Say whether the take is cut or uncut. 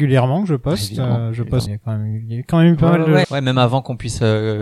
cut